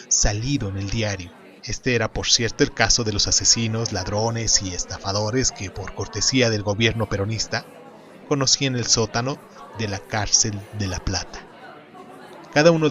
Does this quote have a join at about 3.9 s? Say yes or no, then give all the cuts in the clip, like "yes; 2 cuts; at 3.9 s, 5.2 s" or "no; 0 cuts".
no; 1 cut; at 1.6 s